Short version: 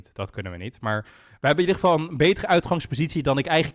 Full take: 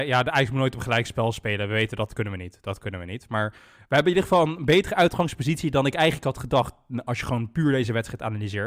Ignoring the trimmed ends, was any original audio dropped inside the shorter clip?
no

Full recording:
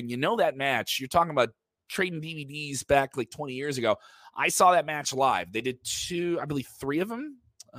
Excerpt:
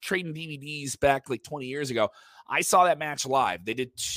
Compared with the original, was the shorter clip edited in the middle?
no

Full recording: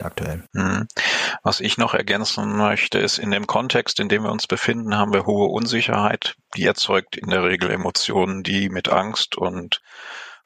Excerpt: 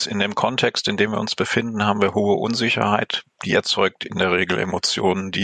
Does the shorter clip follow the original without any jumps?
yes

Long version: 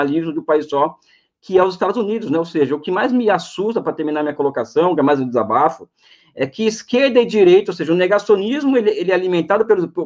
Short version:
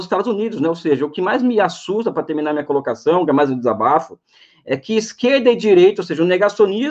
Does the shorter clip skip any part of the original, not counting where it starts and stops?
no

